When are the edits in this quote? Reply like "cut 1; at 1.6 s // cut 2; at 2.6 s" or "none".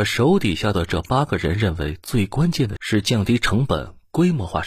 cut 1; at 2.8 s